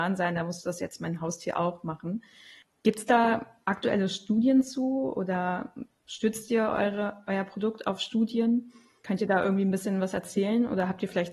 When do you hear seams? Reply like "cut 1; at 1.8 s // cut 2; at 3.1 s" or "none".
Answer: none

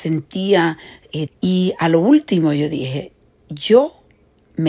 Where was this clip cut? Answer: cut 1; at 1.3 s

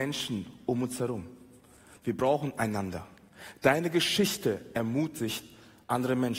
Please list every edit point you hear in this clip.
none

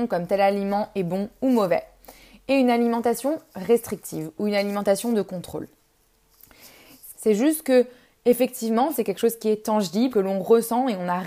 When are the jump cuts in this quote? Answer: cut 1; at 7.1 s // cut 2; at 8.9 s // cut 3; at 10.1 s

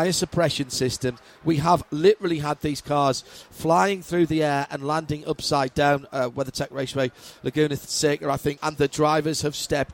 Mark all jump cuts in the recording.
cut 1; at 8.6 s

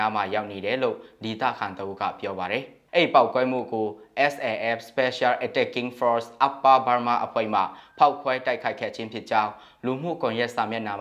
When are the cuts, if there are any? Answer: cut 1; at 2.9 s

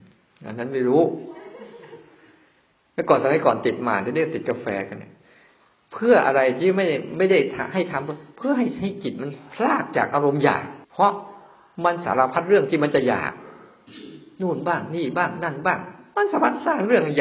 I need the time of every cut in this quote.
cut 1; at 10.8 s

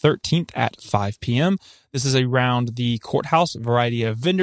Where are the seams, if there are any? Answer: none

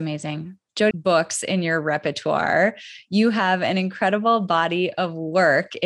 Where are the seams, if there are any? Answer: cut 1; at 0.9 s

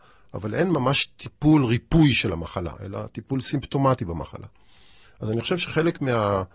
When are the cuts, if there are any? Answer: cut 1; at 5.0 s

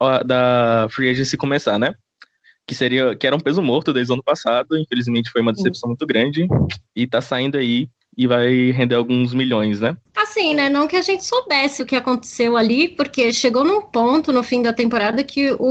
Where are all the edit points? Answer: cut 1; at 11.8 s

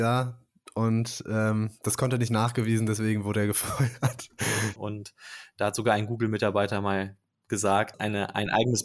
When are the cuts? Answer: cut 1; at 4.8 s // cut 2; at 7.9 s

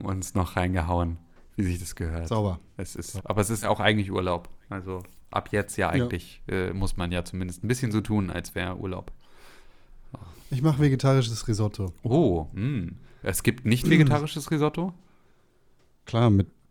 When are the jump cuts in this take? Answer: cut 1; at 3.2 s

